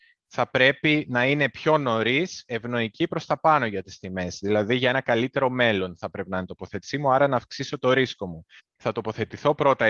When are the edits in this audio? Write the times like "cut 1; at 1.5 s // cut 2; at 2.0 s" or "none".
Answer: cut 1; at 8.6 s